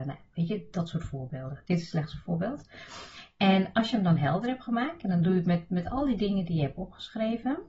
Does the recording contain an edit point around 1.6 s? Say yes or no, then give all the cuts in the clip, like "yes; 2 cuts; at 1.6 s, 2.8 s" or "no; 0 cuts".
no; 0 cuts